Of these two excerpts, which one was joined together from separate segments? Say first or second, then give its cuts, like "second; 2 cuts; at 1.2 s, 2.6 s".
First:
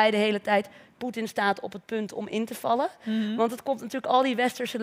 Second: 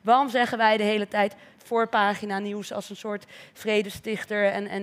second; 1 cut; at 1.6 s